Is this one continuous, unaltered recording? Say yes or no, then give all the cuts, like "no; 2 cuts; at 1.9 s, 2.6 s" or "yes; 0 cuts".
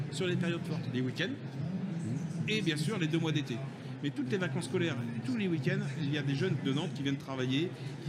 yes; 0 cuts